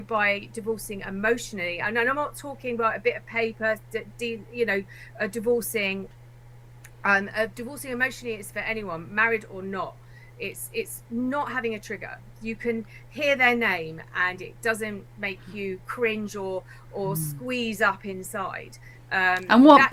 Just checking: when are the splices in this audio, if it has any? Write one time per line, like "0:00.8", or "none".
none